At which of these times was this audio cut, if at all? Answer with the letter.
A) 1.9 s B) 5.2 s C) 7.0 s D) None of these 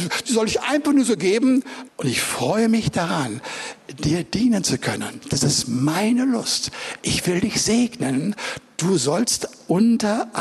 A